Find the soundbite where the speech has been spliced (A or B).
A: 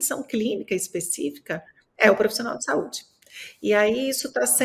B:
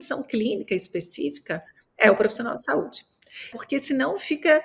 B